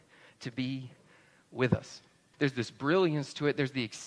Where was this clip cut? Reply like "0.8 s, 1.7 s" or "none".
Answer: 2.3 s